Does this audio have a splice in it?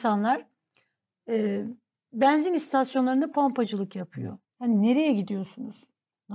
yes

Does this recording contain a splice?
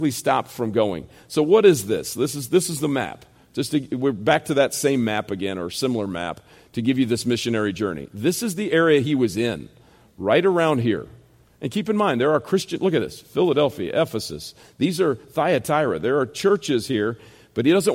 no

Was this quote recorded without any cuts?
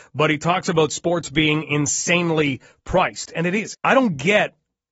no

